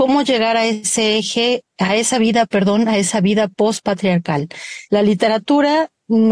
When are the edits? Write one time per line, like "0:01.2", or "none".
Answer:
0:04.9